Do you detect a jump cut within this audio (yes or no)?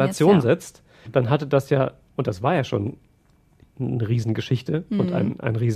yes